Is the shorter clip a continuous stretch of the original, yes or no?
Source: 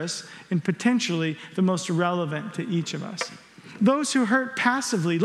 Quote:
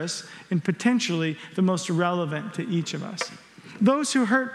yes